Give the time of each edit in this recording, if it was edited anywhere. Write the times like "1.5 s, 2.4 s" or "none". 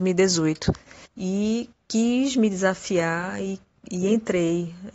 1.0 s